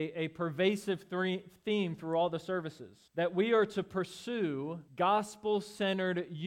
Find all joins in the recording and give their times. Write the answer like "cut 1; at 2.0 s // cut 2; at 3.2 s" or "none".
cut 1; at 3.1 s // cut 2; at 4.9 s